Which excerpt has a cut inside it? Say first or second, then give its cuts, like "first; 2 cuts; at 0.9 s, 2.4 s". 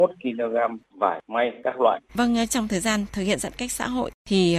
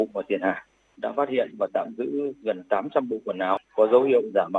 first; 1 cut; at 2.1 s